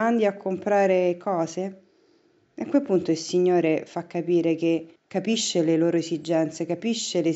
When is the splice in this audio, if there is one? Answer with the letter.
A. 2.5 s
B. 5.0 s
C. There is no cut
B